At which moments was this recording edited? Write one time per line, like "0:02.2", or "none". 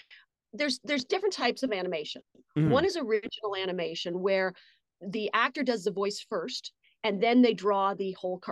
none

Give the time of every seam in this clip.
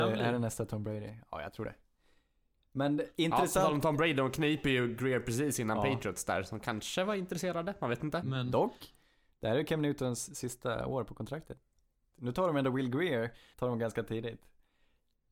0:08.2
0:12.1
0:13.5

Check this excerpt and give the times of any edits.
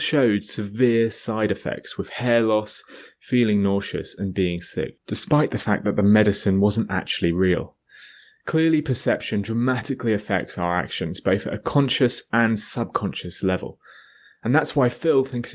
none

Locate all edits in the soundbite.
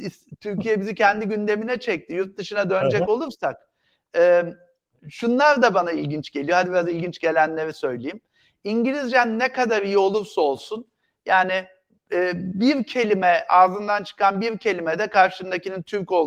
none

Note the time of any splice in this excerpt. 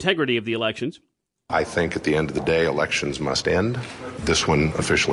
0:01.3
0:04.2

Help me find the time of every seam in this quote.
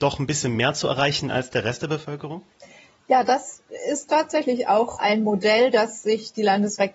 none

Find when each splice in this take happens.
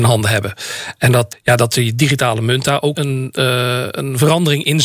0:01.3
0:02.9

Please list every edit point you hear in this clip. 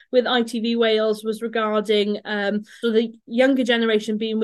0:02.8

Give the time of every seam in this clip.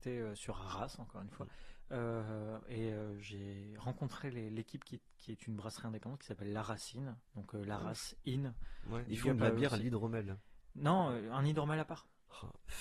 0:07.3
0:09.1

